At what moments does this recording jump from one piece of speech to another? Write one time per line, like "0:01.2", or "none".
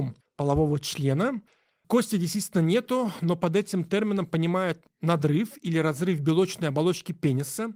none